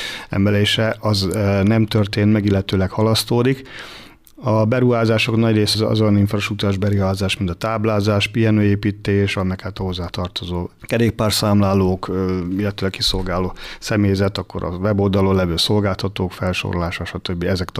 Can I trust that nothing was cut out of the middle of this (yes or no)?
no